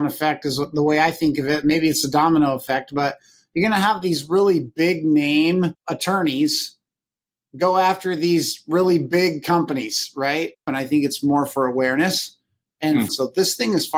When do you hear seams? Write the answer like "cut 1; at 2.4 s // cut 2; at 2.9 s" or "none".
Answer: cut 1; at 10.7 s // cut 2; at 13.1 s